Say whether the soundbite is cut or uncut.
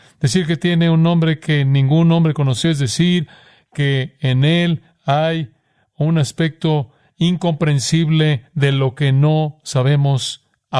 uncut